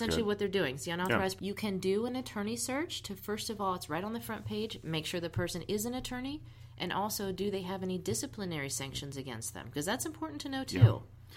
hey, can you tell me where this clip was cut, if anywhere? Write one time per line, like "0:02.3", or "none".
0:01.4